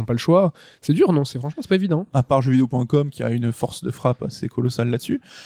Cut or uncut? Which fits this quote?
uncut